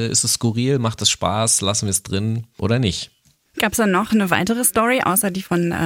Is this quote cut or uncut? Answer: uncut